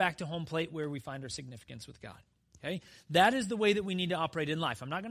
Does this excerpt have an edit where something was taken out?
no; 0 cuts

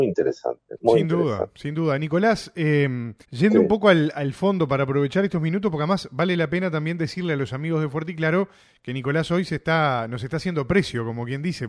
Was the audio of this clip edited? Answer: yes; 1 cut; at 3.2 s

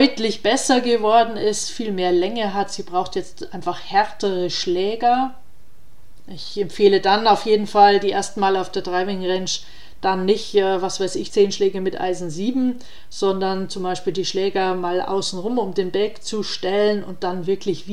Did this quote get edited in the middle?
yes; 2 cuts; at 6.2 s, 11.3 s

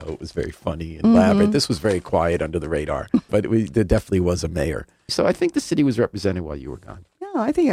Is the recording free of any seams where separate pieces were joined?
no; 2 cuts; at 3.3 s, 5.1 s

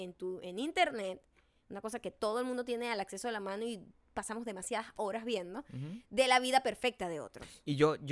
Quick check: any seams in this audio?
no; 0 cuts

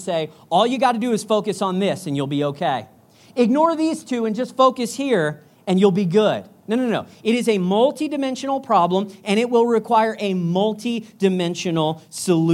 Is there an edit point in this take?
no; 0 cuts

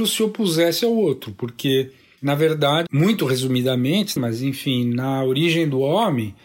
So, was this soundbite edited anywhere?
yes; 2 cuts; at 2.9 s, 4.2 s

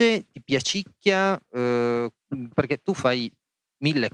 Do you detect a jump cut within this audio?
yes; 1 cut; at 2.5 s

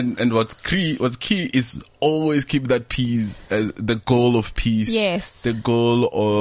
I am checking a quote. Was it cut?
no; 0 cuts

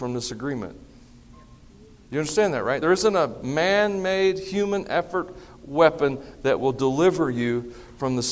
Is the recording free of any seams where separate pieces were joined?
yes; 0 cuts

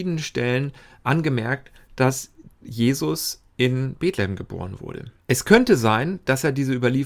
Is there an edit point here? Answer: yes; 1 cut; at 5.2 s

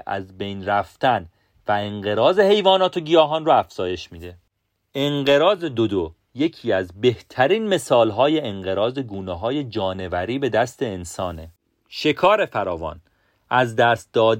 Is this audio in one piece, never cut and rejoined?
yes; 0 cuts

